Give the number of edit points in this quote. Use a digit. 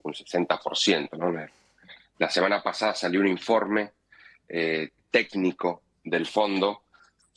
0